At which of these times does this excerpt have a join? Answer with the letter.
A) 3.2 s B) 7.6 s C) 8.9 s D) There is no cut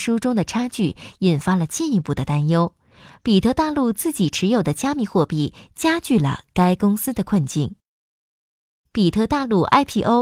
C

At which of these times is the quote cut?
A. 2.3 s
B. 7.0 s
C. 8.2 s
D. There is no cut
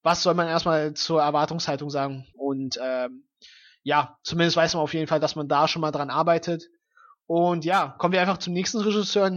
A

